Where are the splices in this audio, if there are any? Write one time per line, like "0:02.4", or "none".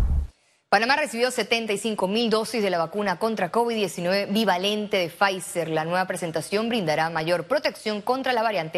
none